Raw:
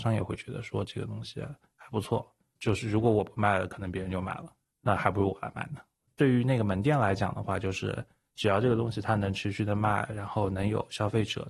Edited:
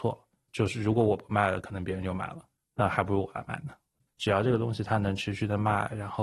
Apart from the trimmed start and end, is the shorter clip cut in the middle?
yes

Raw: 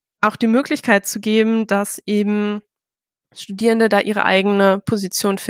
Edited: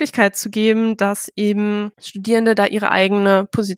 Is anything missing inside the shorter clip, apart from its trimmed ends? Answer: yes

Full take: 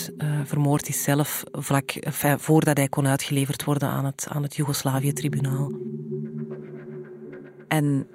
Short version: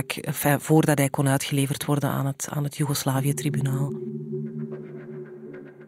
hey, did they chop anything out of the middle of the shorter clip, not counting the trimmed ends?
no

